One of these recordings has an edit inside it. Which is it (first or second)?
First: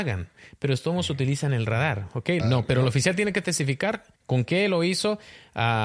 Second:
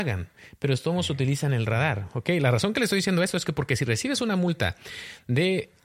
first